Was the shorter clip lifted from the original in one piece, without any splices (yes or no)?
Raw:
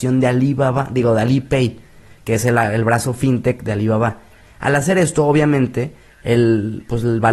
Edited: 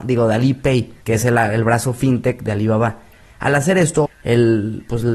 no